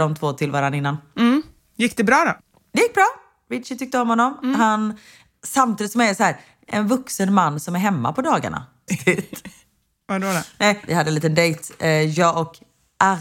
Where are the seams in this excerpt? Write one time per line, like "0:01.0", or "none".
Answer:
0:08.9
0:10.9